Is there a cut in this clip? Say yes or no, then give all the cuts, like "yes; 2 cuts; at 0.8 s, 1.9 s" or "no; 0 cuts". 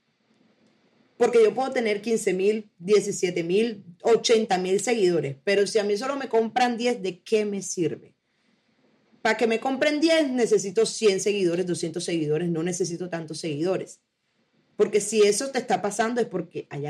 no; 0 cuts